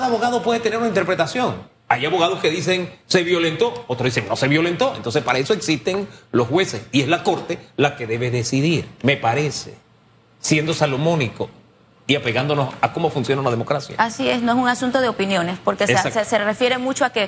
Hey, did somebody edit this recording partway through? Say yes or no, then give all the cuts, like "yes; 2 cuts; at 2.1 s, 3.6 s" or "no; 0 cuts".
no; 0 cuts